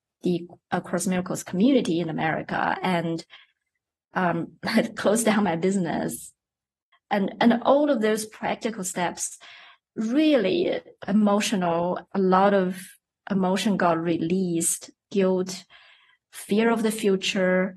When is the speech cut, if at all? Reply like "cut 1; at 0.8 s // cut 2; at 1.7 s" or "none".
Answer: cut 1; at 6.9 s // cut 2; at 11.0 s // cut 3; at 12.1 s